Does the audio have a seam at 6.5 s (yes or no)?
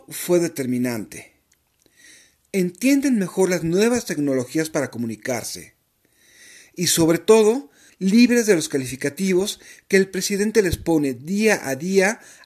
no